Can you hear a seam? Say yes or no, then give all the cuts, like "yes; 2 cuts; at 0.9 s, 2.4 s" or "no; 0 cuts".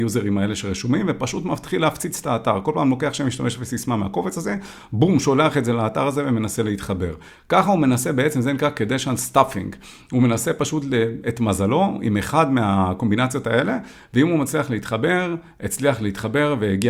no; 0 cuts